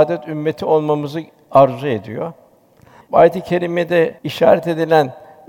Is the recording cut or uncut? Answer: cut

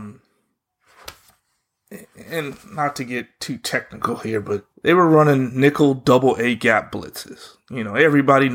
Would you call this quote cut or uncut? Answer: cut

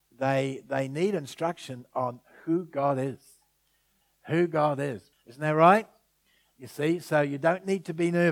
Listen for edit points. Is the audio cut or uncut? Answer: cut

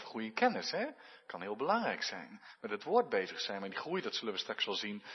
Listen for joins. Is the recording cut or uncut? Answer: uncut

